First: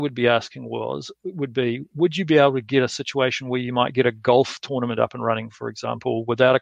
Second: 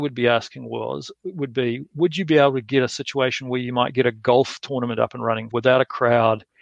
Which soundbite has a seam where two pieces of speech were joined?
second; 1 cut; at 5.5 s

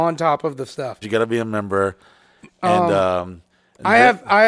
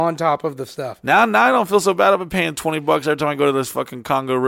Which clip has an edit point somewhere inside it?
first; 1 cut; at 1.0 s

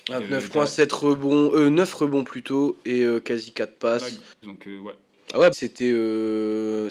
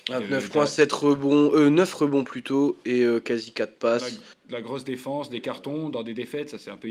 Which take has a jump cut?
first; 2 cuts; at 4.4 s, 5.5 s

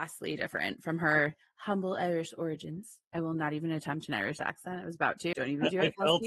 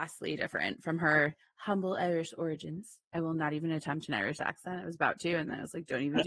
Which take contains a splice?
first; 1 cut; at 5.3 s

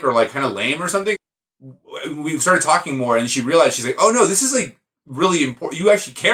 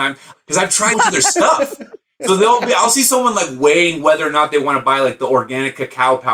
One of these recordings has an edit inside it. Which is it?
second; 1 cut; at 0.9 s

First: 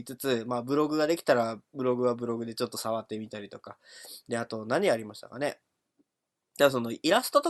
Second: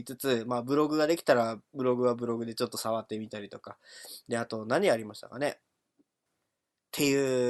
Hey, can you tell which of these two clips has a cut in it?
second; 1 cut; at 6.3 s

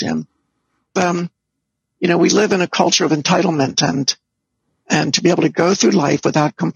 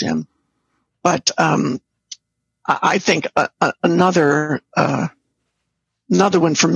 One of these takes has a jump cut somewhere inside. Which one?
first; 1 cut; at 1.0 s

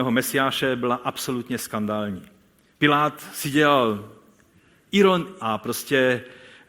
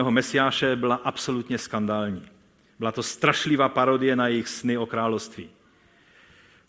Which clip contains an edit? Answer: first; 2 cuts; at 2.7 s, 5.4 s

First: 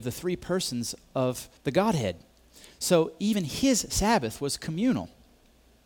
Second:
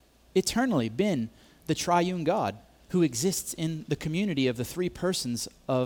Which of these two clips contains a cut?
first; 1 cut; at 1.6 s

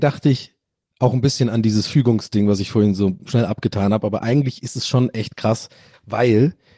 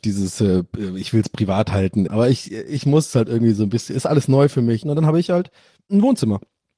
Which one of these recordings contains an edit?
second; 2 cuts; at 2.1 s, 4.8 s

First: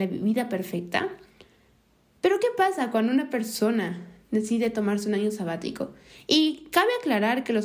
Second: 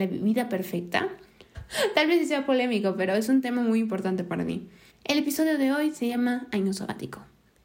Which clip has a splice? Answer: second; 2 cuts; at 1.5 s, 4.9 s

